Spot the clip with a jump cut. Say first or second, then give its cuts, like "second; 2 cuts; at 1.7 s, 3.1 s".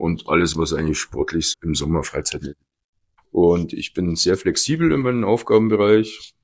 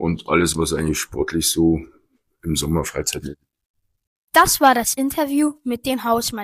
first; 2 cuts; at 1.5 s, 3.2 s